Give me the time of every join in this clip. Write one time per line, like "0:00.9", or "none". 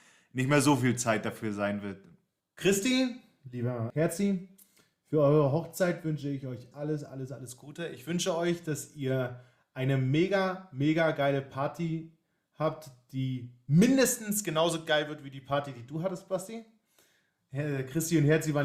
0:06.7